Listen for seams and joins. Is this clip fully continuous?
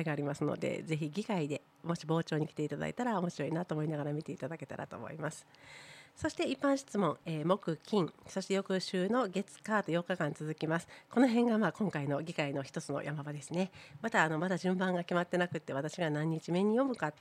yes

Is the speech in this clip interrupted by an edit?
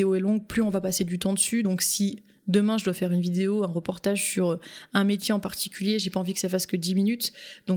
no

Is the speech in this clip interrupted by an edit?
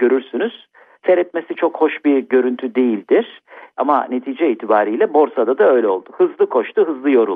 no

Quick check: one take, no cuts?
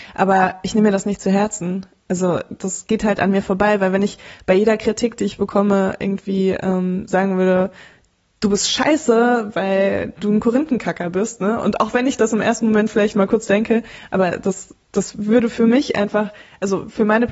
yes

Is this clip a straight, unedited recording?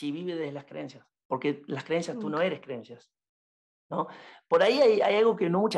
yes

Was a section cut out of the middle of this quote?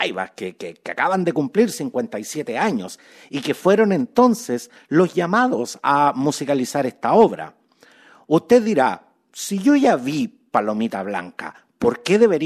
no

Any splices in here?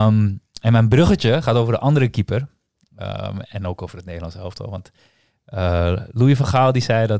no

